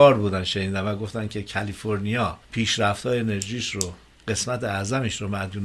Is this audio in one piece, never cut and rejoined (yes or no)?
no